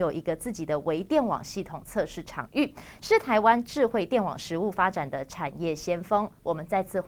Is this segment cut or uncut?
uncut